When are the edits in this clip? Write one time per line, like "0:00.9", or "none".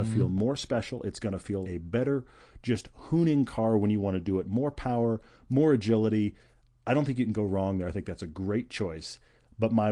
0:01.6